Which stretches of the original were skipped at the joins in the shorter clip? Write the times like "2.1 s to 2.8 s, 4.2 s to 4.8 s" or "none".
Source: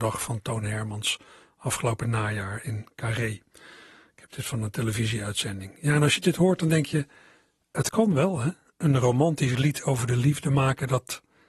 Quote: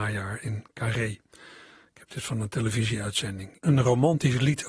5.8 s to 8.7 s